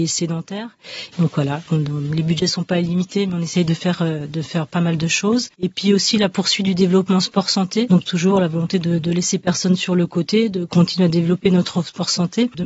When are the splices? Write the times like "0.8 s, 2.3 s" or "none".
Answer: 1.1 s